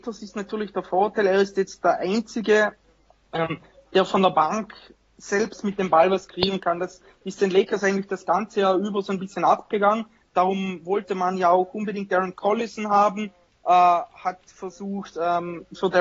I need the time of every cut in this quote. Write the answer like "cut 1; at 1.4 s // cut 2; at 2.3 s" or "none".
none